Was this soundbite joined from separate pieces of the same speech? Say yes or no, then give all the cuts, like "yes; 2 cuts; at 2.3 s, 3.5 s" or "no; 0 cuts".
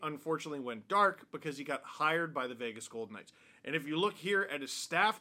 no; 0 cuts